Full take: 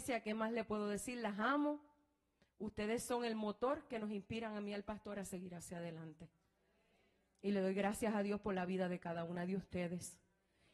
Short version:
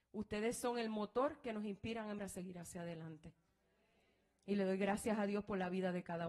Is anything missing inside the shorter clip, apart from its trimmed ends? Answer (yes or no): yes